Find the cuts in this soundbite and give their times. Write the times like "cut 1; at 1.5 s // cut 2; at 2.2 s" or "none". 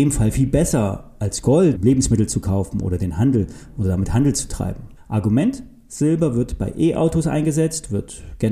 cut 1; at 1.7 s // cut 2; at 5.0 s